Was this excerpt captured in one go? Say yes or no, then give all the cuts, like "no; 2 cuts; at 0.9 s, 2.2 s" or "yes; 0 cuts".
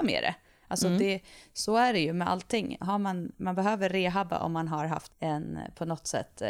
no; 2 cuts; at 2.8 s, 5.1 s